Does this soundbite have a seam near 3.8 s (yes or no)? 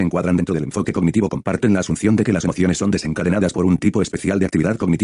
no